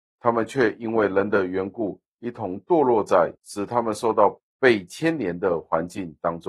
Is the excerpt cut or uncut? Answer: uncut